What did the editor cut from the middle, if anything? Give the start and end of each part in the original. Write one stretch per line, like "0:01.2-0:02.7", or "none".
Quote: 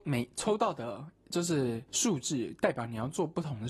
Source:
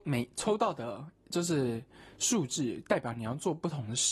0:01.9-0:02.2